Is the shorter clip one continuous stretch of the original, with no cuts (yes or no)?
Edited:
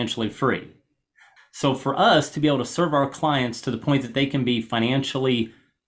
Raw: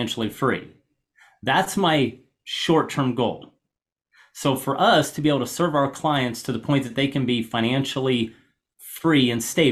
no